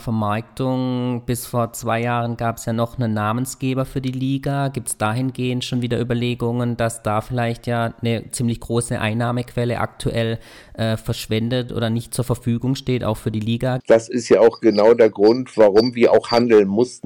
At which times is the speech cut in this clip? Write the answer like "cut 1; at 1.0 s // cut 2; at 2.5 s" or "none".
cut 1; at 13.8 s

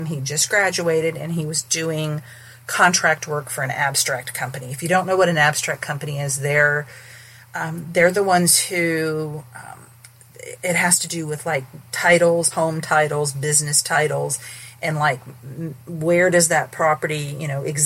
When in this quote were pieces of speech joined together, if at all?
cut 1; at 12.5 s

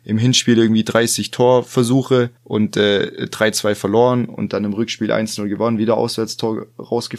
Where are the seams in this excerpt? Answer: cut 1; at 2.4 s

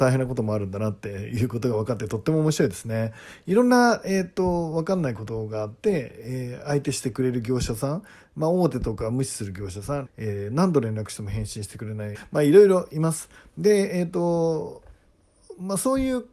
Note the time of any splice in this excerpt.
cut 1; at 10.0 s // cut 2; at 12.1 s

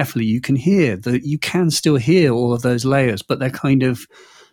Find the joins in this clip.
none

